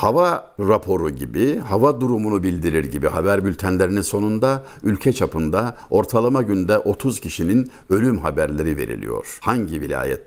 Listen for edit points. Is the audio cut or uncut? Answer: uncut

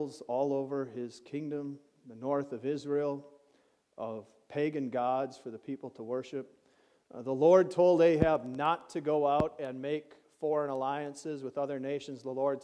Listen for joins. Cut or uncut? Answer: uncut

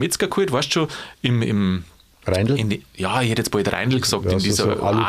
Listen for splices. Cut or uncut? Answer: uncut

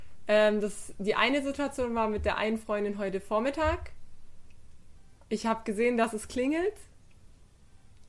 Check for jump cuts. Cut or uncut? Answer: uncut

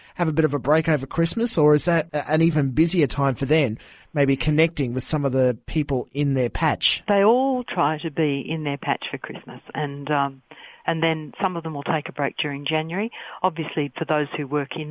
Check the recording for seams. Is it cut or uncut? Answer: uncut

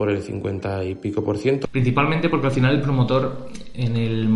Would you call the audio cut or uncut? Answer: cut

